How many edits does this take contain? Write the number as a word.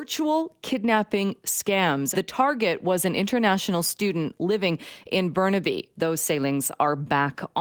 two